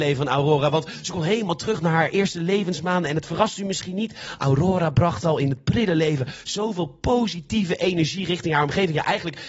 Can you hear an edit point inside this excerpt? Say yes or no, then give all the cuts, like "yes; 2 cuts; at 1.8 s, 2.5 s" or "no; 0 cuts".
no; 0 cuts